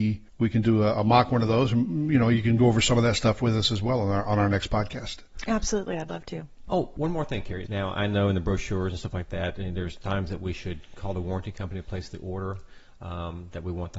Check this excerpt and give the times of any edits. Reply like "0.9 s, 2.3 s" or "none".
7.7 s

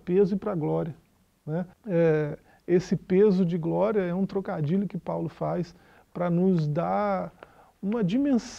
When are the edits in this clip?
1.7 s

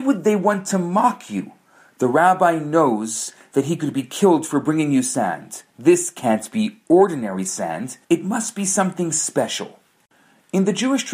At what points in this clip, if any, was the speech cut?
5.7 s, 8.0 s

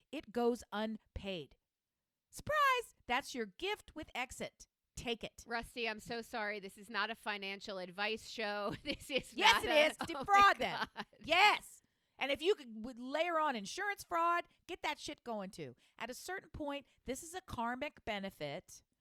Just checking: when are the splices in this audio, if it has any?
10.0 s

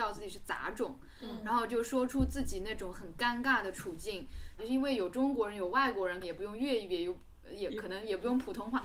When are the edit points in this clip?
4.6 s, 6.2 s

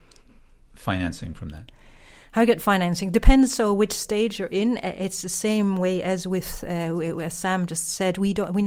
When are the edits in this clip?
none

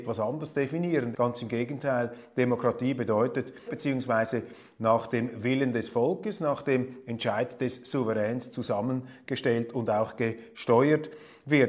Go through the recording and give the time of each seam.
1.1 s, 3.7 s

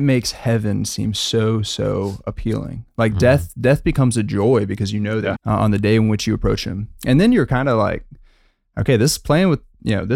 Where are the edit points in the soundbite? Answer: 5.3 s

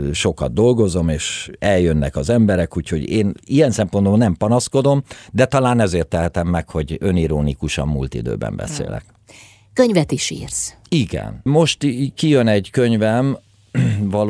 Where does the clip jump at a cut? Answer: 11.5 s

